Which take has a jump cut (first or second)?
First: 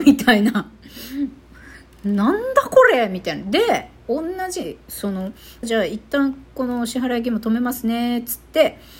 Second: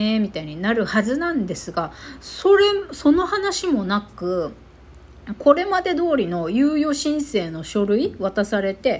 first